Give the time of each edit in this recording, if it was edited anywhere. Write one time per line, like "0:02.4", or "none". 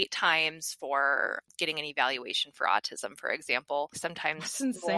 0:03.9